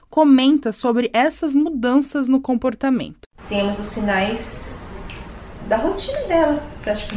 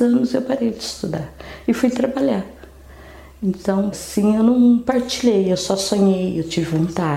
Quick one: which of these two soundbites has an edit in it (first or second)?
second